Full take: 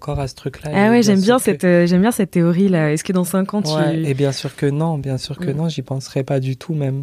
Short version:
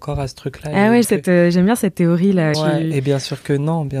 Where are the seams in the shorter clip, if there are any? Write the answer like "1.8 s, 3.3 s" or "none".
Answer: 1.0 s, 2.5 s